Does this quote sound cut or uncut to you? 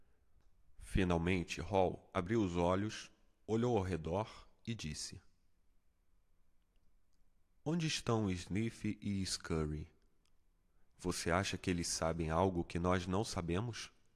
uncut